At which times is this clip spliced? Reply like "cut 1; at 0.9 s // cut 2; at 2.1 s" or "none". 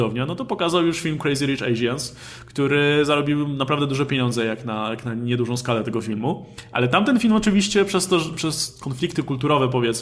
none